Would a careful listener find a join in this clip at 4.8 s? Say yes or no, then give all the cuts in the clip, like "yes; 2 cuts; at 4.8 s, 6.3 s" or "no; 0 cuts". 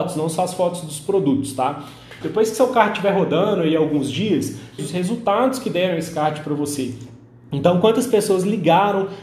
yes; 2 cuts; at 2.2 s, 4.8 s